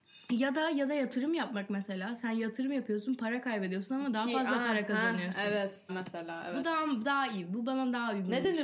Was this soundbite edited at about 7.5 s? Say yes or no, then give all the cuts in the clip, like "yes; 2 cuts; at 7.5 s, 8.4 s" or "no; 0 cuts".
no; 1 cut; at 5.9 s